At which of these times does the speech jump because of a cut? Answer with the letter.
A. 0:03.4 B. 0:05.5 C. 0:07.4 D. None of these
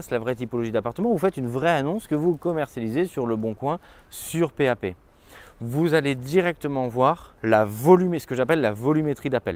C